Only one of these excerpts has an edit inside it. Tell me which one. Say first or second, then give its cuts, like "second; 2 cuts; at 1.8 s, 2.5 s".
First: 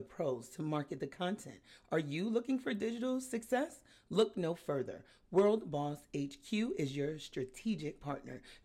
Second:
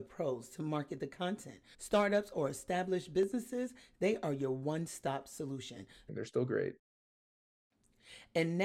second; 2 cuts; at 1.7 s, 6.1 s